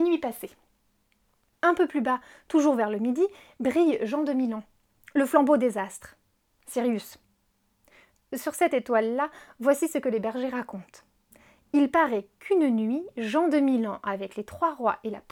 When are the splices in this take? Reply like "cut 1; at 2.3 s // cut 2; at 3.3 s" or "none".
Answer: none